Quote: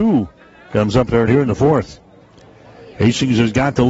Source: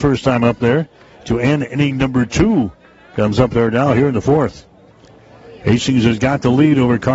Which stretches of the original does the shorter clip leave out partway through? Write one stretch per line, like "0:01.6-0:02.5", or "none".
0:03.7-0:03.9